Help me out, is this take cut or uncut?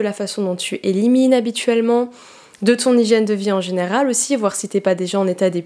uncut